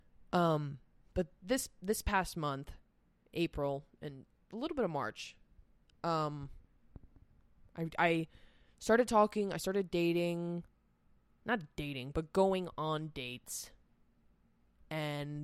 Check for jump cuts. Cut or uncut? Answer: uncut